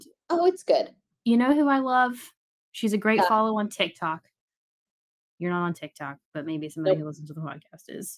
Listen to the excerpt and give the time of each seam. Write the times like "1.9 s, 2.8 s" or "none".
2.6 s